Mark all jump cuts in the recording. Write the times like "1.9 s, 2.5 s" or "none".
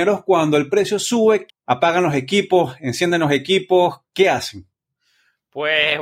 1.5 s